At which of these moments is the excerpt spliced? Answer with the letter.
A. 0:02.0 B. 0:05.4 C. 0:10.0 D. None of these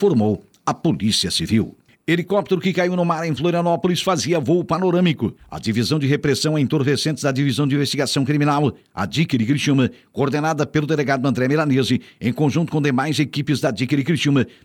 B